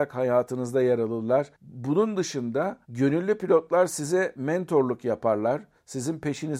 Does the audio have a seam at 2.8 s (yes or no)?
yes